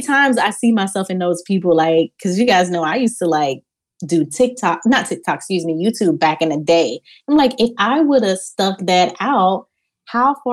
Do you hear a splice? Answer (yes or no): no